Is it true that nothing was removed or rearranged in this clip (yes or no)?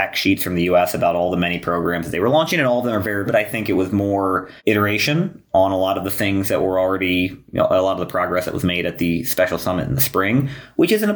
no